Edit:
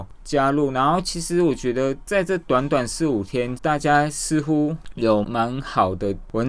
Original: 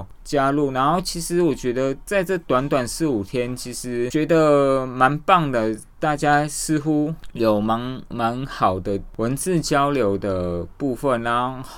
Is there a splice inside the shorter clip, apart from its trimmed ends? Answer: yes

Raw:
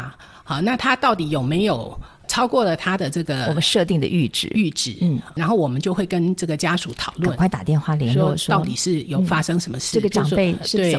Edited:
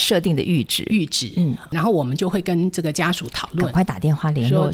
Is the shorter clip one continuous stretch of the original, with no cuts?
yes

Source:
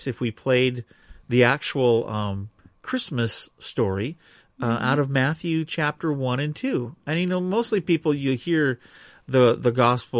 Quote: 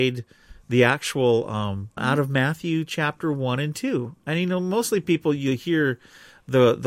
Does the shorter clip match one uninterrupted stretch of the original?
no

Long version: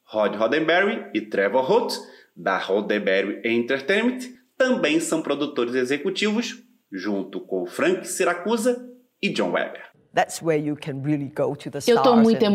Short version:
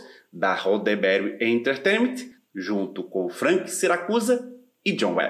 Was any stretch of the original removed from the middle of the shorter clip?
yes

